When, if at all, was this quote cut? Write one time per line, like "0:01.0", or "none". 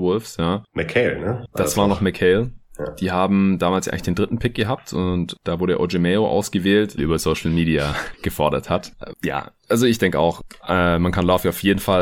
0:07.0